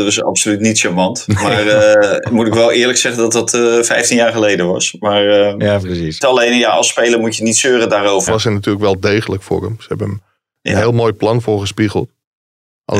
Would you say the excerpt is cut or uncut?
cut